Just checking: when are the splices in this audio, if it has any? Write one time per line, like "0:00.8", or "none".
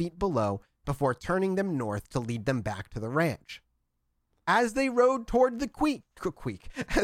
none